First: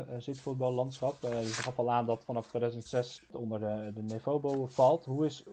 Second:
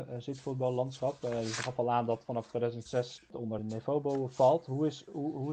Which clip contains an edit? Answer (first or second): second